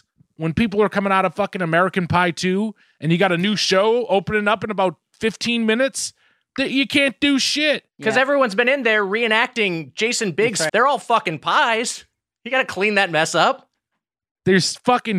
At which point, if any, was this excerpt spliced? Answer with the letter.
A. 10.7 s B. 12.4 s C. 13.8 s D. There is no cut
A